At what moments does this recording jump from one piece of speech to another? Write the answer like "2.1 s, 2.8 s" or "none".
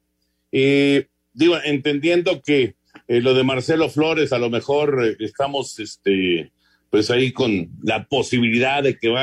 none